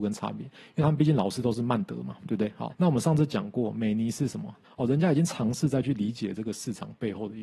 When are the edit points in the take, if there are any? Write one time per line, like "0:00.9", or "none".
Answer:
0:02.7
0:04.6